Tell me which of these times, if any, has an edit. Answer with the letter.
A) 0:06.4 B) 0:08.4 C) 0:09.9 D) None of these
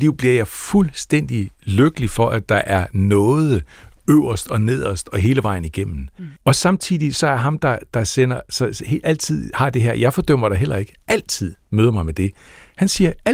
A